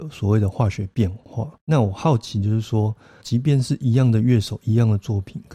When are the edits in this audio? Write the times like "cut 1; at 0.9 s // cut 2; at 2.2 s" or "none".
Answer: cut 1; at 3.2 s